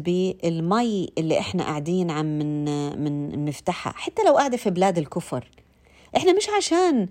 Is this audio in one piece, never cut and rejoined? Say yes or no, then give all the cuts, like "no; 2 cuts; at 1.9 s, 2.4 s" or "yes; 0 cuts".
yes; 0 cuts